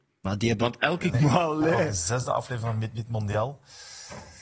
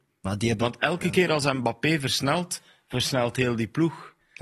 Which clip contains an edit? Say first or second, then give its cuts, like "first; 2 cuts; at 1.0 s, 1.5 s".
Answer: first; 1 cut; at 1.1 s